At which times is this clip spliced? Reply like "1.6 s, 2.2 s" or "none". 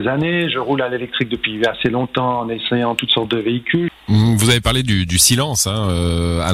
3.9 s